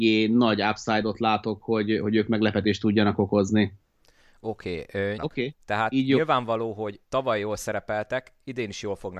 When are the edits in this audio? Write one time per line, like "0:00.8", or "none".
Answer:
0:05.2